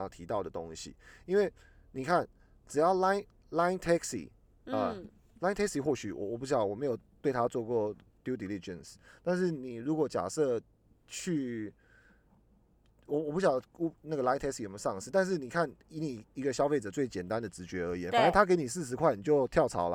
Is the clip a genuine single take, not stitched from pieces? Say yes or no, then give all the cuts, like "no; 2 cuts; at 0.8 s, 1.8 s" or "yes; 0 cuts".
yes; 0 cuts